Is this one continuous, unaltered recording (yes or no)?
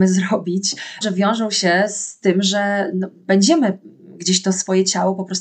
no